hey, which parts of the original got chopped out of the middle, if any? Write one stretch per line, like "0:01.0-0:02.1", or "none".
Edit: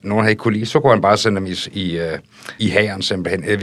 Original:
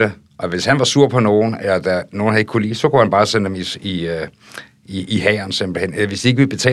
0:04.7-0:05.1